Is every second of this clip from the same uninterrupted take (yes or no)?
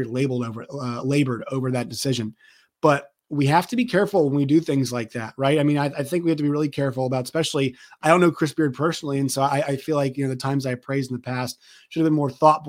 yes